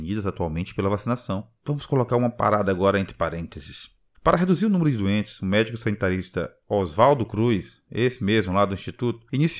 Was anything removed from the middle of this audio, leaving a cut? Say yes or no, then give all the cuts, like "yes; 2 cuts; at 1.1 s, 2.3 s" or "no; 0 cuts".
yes; 2 cuts; at 1.6 s, 4.1 s